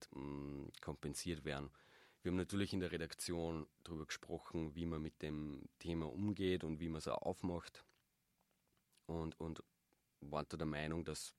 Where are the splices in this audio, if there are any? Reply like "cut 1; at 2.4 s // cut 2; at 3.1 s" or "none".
none